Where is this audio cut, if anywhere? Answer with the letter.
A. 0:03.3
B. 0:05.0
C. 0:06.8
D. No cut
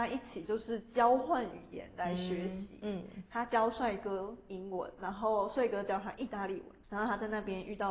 C